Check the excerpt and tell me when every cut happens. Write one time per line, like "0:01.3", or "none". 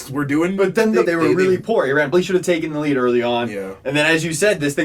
0:01.1
0:02.1